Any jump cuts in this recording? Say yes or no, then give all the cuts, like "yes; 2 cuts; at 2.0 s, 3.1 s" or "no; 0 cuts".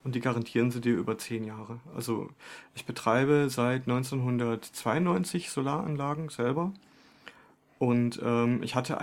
no; 0 cuts